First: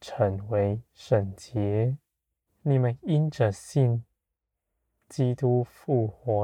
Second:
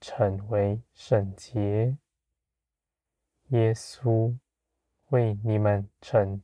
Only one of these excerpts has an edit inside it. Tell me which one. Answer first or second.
first